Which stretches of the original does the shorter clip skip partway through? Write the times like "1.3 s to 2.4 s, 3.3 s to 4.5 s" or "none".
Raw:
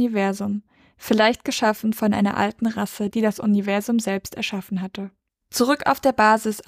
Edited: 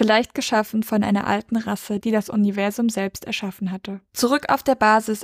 5.2 s to 5.4 s